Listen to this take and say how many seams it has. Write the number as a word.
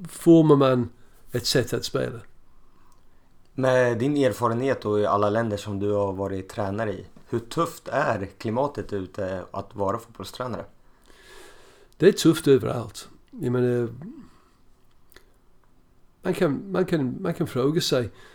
zero